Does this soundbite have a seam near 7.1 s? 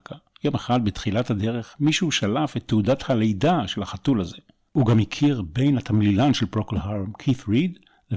no; 1 cut; at 4.7 s

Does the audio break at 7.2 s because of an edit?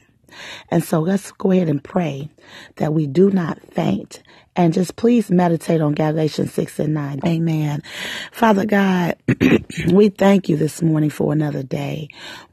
yes; 1 cut; at 7.2 s

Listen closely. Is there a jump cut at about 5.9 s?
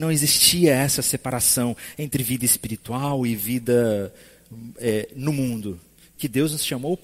no; 0 cuts

